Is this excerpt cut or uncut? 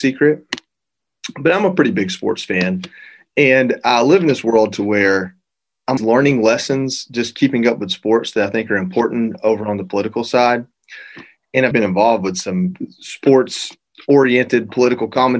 cut